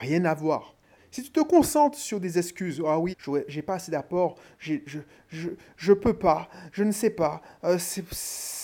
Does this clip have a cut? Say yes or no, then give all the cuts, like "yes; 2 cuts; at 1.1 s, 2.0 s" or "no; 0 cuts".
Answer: yes; 2 cuts; at 1.0 s, 3.1 s